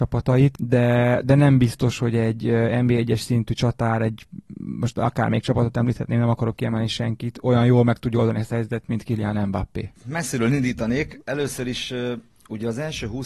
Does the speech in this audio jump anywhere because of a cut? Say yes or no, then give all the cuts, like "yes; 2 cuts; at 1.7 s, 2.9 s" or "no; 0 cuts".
no; 0 cuts